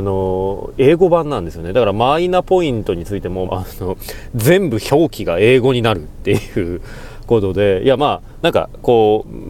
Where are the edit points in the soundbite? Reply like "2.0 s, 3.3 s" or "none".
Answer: 3.5 s, 8.4 s

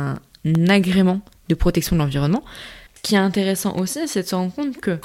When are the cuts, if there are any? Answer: 2.9 s

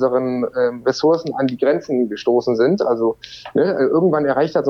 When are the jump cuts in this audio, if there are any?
none

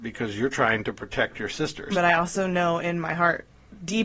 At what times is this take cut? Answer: 1.9 s

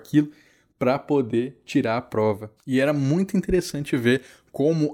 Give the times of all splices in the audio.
none

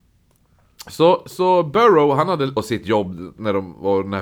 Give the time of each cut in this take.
2.6 s

